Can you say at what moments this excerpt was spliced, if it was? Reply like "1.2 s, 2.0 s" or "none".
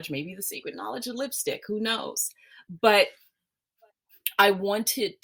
none

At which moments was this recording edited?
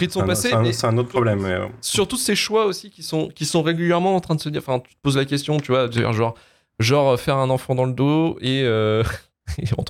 none

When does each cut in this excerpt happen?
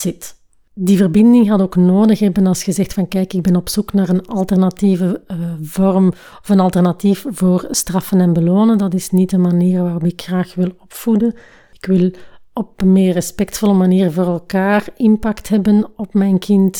none

